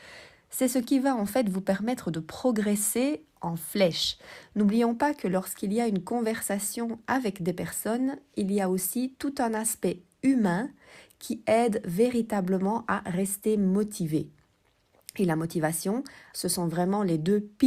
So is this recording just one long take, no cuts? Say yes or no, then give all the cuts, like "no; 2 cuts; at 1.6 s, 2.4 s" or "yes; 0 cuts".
no; 1 cut; at 16.3 s